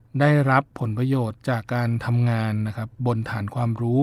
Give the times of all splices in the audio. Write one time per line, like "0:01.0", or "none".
0:01.6